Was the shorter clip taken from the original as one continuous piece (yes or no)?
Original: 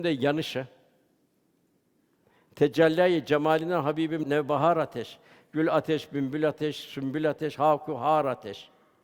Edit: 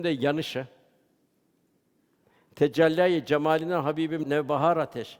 yes